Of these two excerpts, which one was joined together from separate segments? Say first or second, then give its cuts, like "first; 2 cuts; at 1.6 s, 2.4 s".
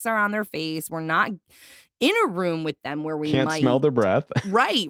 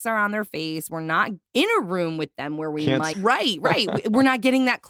second; 2 cuts; at 1.5 s, 3.1 s